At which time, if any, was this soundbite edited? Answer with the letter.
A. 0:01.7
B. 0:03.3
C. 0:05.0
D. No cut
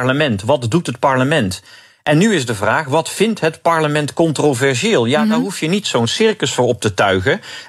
D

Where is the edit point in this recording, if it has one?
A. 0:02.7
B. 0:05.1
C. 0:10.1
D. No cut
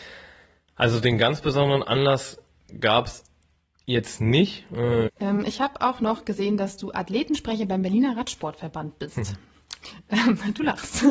B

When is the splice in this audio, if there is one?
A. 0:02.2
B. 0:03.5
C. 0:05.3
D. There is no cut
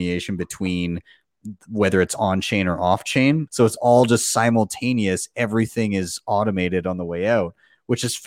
B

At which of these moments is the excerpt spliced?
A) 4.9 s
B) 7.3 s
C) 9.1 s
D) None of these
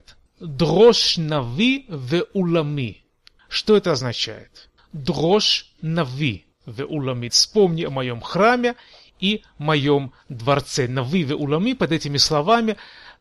B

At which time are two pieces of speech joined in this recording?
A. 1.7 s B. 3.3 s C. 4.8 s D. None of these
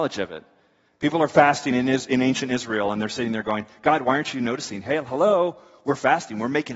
D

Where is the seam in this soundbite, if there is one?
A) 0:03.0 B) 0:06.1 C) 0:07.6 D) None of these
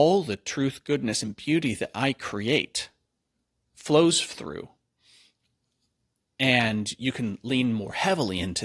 D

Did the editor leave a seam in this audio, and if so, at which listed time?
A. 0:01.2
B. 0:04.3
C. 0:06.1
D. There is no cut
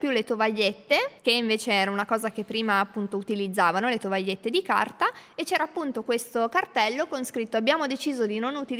A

